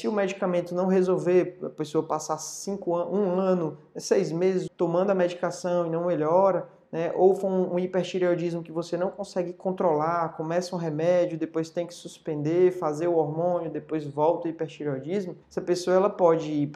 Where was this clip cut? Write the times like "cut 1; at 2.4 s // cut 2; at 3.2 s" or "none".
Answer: cut 1; at 4.7 s // cut 2; at 15.4 s

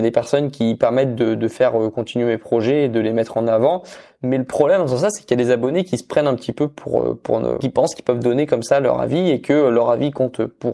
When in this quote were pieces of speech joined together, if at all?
cut 1; at 4.2 s // cut 2; at 7.6 s

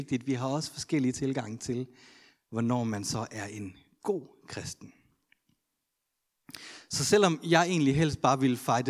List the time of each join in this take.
none

